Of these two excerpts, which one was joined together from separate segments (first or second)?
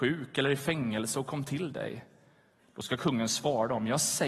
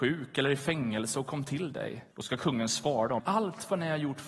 second